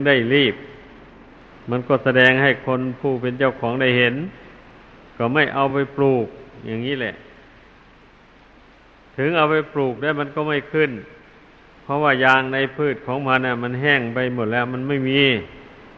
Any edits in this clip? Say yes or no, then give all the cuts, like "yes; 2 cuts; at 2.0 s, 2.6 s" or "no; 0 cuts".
no; 0 cuts